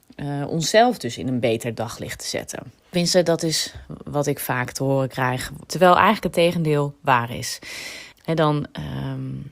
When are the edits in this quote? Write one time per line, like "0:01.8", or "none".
0:02.8
0:05.7
0:08.1